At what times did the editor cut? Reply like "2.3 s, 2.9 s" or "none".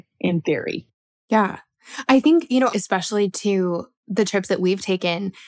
2.7 s